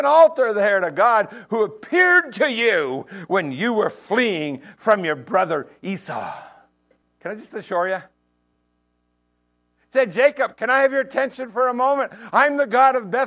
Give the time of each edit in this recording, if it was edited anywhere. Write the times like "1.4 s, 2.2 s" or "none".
7.0 s, 8.5 s